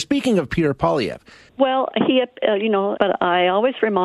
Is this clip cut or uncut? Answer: cut